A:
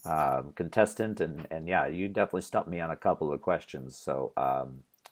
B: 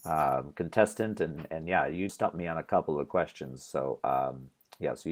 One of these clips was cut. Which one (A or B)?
B